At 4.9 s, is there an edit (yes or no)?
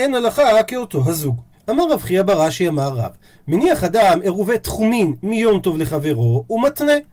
no